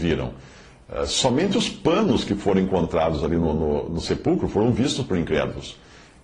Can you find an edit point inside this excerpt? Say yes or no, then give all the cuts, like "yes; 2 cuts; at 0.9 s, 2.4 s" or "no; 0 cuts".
no; 0 cuts